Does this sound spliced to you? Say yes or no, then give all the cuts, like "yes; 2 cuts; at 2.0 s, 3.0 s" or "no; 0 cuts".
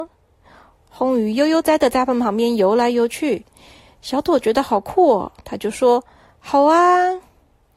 yes; 1 cut; at 1.6 s